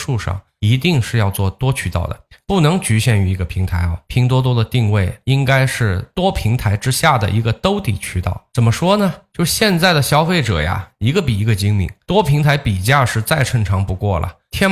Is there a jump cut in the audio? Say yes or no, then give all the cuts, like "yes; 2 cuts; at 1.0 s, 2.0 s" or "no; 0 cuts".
no; 0 cuts